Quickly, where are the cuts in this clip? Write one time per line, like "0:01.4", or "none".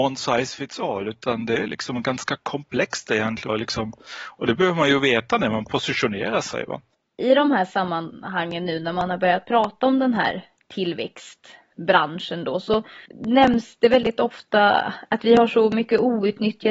0:03.5